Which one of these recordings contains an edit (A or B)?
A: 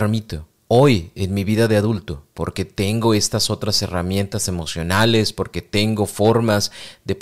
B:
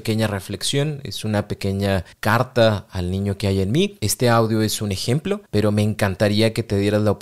B